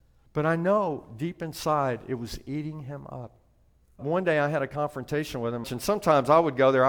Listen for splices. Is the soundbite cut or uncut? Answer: cut